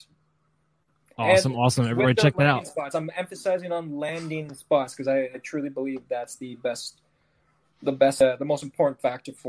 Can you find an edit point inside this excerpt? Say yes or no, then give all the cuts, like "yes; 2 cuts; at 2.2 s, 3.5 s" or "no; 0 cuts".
no; 0 cuts